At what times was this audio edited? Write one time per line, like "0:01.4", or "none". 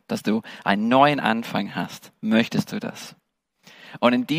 none